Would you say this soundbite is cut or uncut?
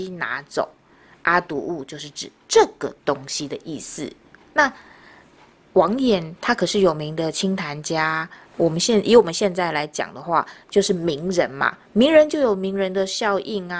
uncut